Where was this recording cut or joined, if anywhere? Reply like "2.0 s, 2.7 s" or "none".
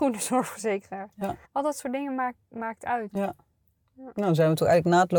1.4 s, 3.1 s